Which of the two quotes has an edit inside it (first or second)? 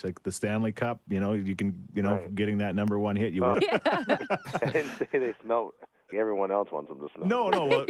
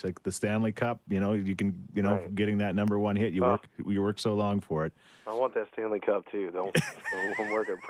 first